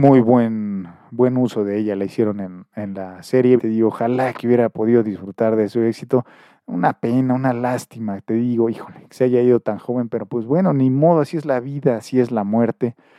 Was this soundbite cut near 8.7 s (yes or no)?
no